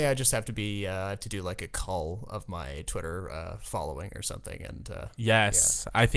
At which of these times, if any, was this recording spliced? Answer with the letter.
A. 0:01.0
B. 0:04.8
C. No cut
C